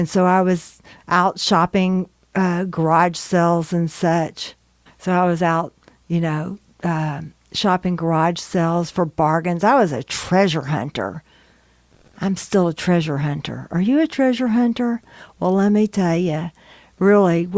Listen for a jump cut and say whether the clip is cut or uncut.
uncut